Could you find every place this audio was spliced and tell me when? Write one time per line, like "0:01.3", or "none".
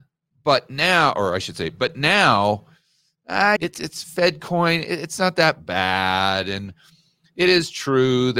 0:03.6